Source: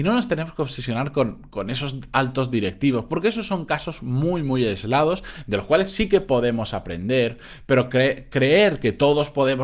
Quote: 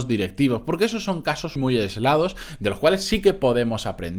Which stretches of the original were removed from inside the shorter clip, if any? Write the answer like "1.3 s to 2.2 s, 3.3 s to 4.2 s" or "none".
4.0 s to 4.4 s